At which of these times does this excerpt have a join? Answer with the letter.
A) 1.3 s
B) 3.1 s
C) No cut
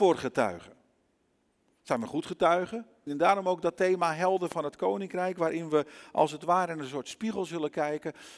B